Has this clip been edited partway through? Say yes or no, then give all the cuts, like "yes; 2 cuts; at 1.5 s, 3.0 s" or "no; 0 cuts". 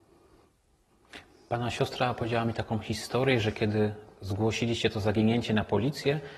no; 0 cuts